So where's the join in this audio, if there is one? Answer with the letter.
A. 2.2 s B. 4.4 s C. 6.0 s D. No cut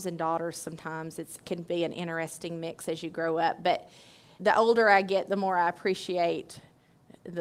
B